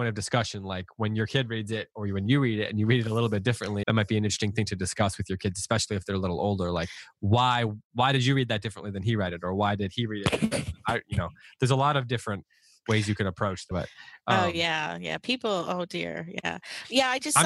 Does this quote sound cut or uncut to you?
cut